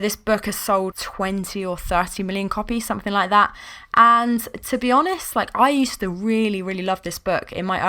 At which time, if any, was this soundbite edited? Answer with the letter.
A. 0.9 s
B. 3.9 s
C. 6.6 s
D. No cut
A